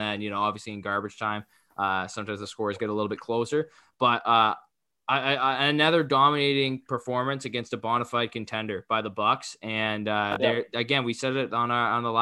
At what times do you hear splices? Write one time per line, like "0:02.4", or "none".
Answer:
none